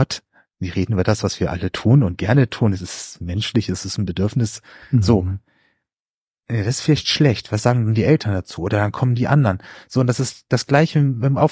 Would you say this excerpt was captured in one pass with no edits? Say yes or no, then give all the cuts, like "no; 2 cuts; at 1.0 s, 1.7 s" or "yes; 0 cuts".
yes; 0 cuts